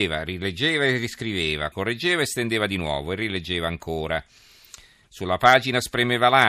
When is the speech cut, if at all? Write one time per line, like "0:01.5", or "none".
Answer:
0:01.7
0:05.0